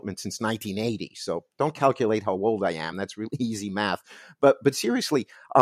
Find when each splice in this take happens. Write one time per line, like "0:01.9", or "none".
none